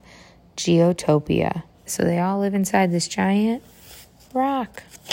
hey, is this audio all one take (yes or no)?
no